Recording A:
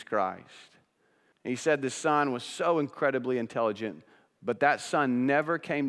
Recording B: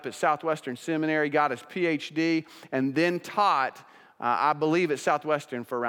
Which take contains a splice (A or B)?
A